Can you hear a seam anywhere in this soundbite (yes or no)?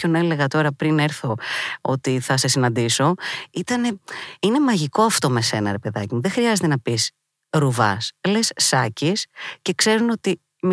no